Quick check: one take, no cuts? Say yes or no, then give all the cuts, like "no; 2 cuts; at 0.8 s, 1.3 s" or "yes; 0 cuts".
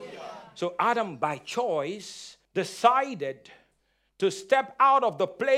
no; 1 cut; at 2.5 s